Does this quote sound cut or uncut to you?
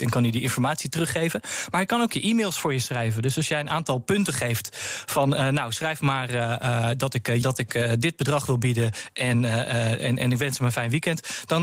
cut